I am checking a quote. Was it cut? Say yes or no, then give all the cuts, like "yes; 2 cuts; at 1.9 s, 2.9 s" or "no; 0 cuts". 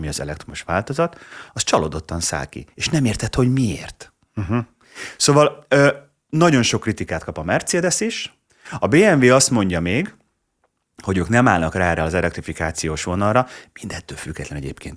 no; 0 cuts